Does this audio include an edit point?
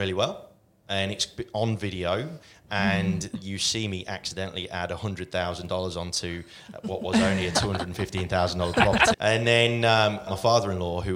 yes; 2 cuts; at 9.1 s, 10.3 s

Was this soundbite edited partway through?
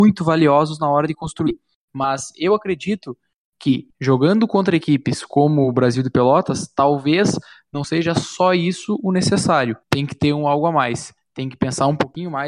yes; 1 cut; at 9.8 s

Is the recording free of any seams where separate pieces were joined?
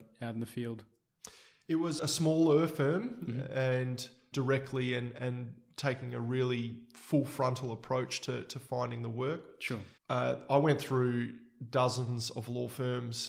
no; 3 cuts; at 2.0 s, 4.3 s, 10.0 s

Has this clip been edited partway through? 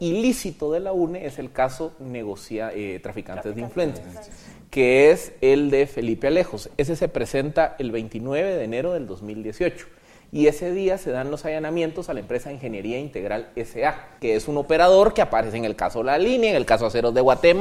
yes; 1 cut; at 14.2 s

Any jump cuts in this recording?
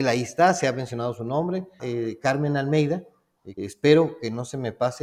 yes; 2 cuts; at 1.8 s, 3.6 s

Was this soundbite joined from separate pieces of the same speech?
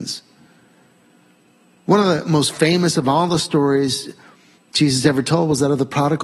no; 0 cuts

